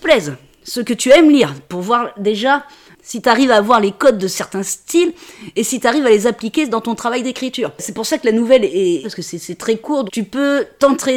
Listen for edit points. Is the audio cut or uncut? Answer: cut